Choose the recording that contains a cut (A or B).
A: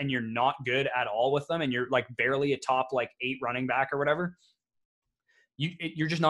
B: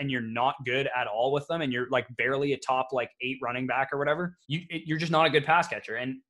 B